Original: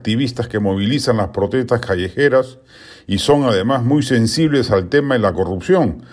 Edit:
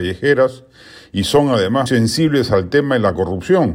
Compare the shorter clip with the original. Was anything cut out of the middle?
yes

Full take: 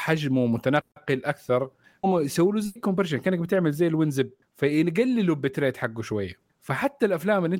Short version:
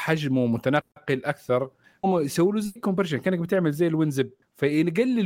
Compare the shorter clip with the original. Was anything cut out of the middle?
no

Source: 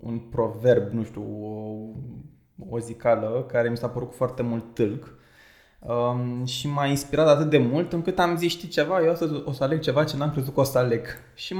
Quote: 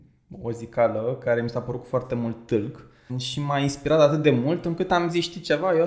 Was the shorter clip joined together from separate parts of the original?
yes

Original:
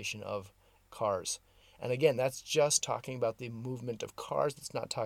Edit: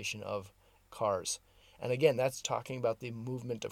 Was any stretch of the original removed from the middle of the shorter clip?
yes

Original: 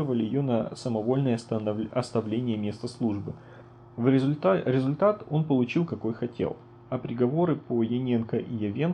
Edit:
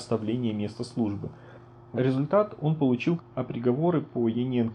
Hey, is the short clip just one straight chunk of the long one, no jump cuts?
no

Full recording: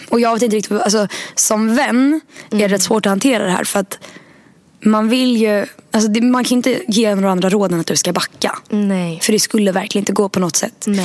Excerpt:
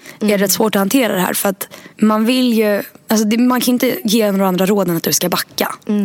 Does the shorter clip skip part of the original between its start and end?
yes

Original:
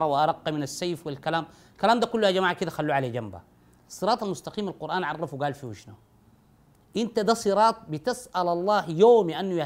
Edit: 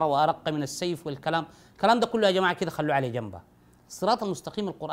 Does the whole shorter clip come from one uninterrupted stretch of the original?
yes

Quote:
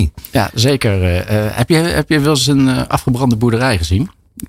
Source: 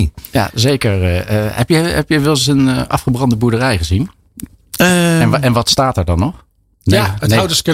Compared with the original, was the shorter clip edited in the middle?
no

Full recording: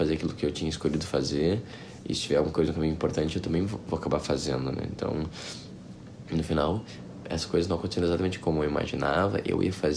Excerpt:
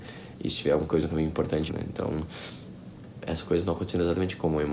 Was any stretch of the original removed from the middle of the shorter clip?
yes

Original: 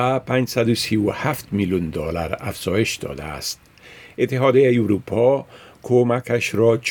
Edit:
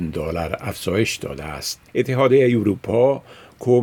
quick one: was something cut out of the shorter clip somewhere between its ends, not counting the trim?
yes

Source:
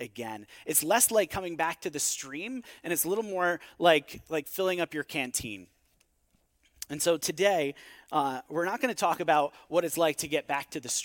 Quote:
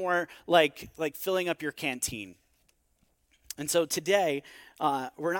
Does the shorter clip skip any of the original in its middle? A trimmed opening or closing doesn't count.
no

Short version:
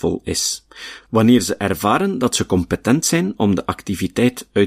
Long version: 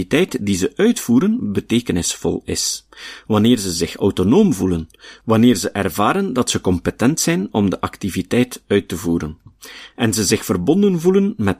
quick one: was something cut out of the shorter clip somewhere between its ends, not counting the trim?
yes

